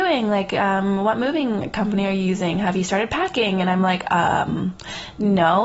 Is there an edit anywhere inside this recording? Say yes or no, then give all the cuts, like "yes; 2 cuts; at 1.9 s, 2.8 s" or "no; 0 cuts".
no; 0 cuts